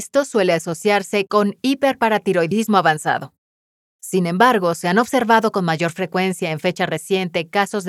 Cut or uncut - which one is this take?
uncut